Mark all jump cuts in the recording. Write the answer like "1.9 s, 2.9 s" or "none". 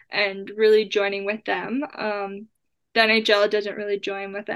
none